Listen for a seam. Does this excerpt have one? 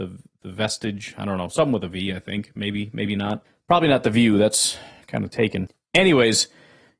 no; 0 cuts

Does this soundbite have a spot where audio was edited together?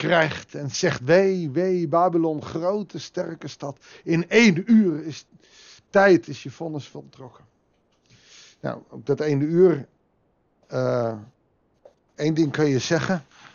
no; 0 cuts

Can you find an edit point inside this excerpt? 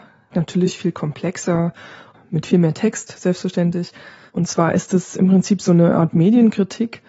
no; 0 cuts

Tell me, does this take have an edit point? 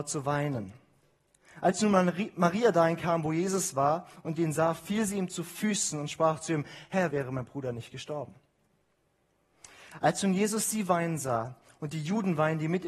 yes; 1 cut; at 7.1 s

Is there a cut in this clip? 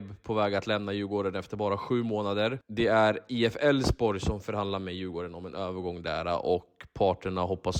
no; 0 cuts

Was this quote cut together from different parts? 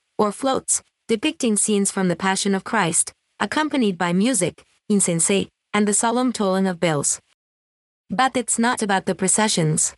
yes; 1 cut; at 8.8 s

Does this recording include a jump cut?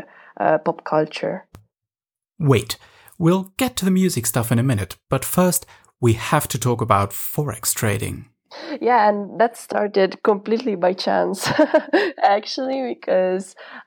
no; 0 cuts

